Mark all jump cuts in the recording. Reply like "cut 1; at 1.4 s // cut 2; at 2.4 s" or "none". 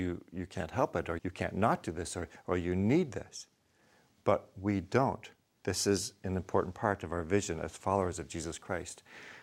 cut 1; at 1.2 s